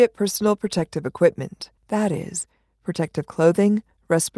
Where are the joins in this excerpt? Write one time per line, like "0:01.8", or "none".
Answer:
0:01.8